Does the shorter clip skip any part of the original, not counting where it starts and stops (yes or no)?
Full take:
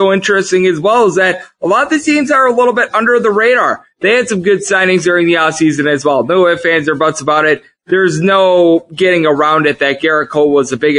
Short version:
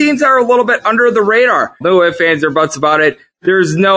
yes